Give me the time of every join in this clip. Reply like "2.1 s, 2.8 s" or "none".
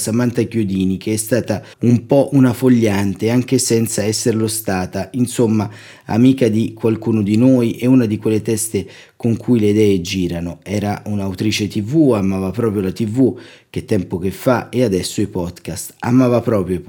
1.7 s